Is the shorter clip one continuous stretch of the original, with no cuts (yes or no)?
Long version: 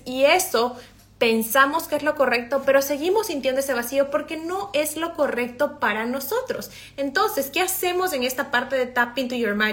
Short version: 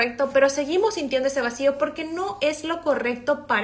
yes